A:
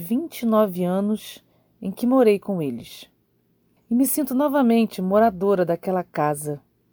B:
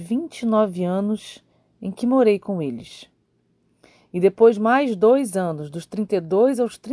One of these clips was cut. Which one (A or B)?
A